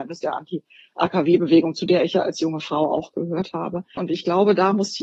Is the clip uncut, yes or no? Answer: no